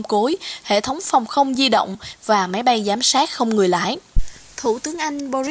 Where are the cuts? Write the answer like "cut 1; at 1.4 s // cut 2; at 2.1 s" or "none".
none